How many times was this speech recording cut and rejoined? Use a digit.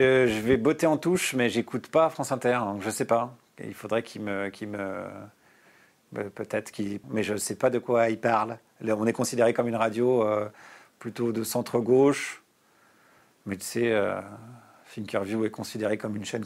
1